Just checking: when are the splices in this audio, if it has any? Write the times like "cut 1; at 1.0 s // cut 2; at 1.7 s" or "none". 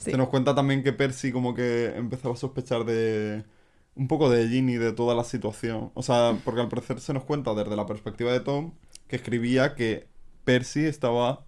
none